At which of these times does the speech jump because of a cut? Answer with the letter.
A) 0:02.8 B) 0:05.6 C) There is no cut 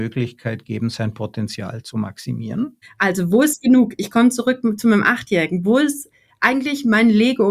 A